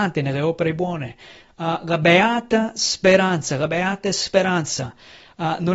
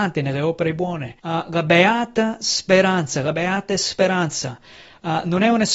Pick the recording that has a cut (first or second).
second